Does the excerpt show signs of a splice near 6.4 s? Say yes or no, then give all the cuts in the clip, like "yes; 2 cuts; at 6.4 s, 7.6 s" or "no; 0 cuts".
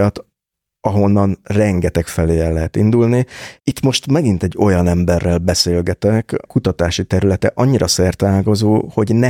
yes; 2 cuts; at 3.6 s, 6.4 s